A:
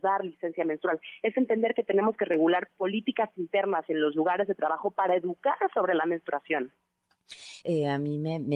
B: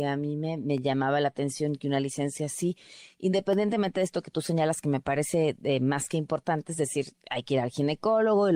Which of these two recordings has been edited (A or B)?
A